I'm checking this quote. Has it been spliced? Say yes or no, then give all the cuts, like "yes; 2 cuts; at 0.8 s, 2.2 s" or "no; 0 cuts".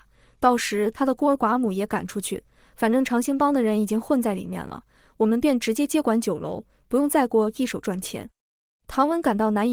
no; 0 cuts